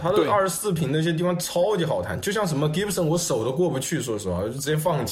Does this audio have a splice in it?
no; 0 cuts

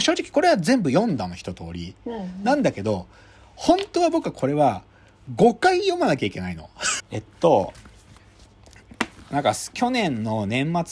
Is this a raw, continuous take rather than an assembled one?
no; 1 cut; at 7.0 s

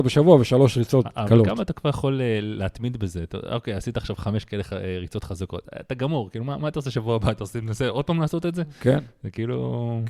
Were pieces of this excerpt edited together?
no; 0 cuts

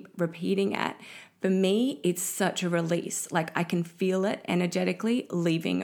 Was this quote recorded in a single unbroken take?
yes; 0 cuts

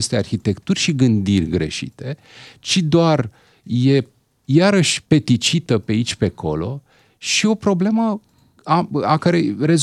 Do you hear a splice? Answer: no; 0 cuts

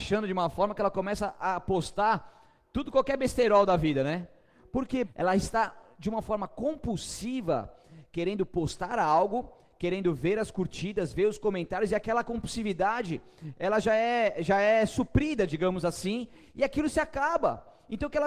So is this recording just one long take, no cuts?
no; 1 cut; at 5.1 s

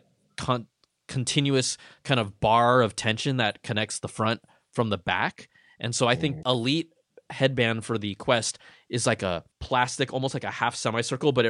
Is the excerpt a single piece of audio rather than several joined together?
no; 2 cuts; at 6.4 s, 9.5 s

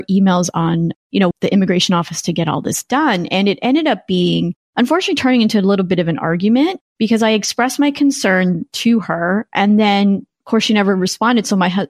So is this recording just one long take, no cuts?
no; 1 cut; at 1.3 s

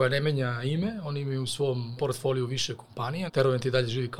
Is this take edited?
yes; 2 cuts; at 2.0 s, 3.3 s

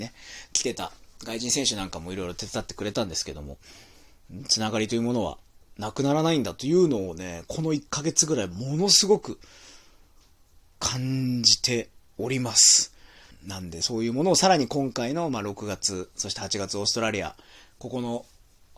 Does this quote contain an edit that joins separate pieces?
yes; 1 cut; at 13.3 s

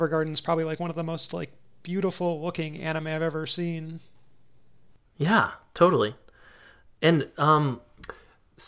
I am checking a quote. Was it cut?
no; 0 cuts

